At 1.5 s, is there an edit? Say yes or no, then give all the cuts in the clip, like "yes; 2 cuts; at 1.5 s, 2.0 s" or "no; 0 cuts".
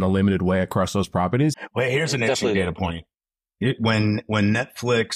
yes; 1 cut; at 1.5 s